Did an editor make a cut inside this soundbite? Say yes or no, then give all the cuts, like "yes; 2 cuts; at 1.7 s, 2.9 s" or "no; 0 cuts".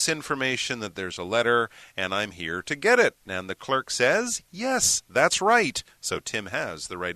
no; 0 cuts